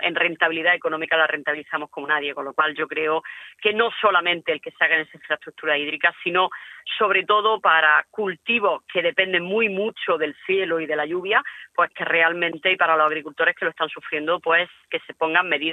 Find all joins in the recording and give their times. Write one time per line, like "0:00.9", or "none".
none